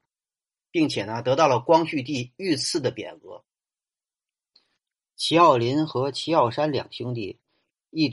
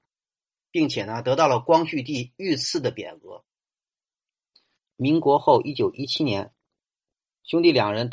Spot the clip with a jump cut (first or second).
second